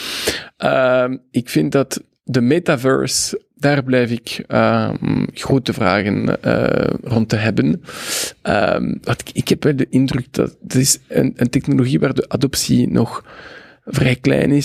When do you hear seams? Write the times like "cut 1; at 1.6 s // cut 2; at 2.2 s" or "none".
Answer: none